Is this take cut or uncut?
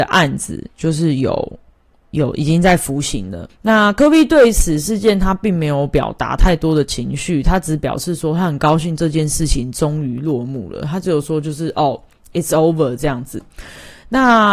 cut